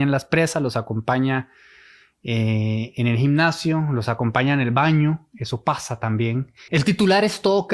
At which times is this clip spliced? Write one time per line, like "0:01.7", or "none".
0:06.7